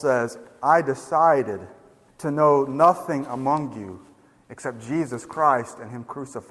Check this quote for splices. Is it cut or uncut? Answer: cut